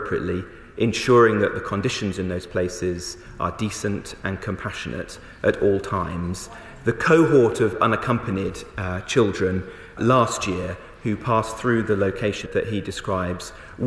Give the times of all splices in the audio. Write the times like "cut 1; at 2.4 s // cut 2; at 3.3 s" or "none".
cut 1; at 10.0 s // cut 2; at 12.5 s